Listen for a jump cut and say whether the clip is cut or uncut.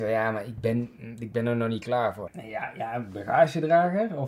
cut